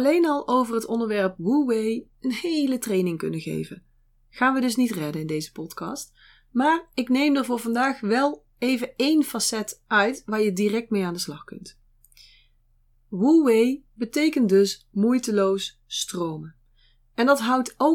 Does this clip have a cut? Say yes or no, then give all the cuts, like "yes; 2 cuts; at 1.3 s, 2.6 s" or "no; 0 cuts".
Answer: no; 0 cuts